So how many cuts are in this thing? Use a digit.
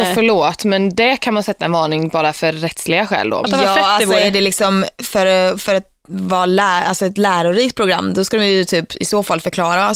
1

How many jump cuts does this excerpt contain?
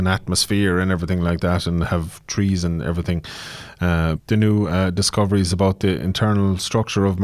1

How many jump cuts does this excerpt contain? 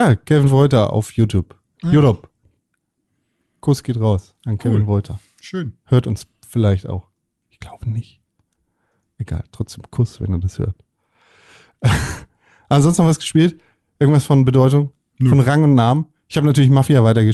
0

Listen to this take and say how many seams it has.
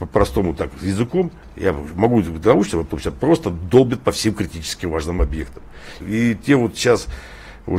2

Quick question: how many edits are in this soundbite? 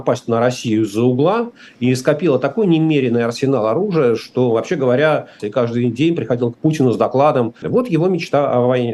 2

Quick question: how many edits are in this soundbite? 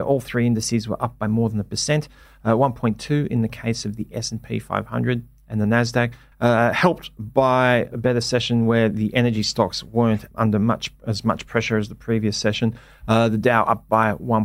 1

